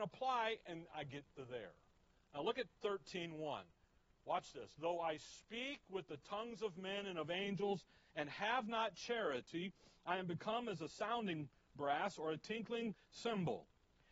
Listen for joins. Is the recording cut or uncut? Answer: uncut